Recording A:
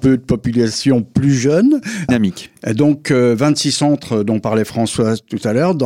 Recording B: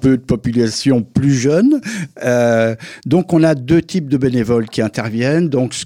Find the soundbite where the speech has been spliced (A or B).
A